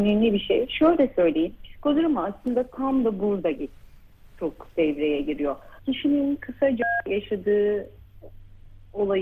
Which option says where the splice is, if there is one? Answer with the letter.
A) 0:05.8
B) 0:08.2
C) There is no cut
A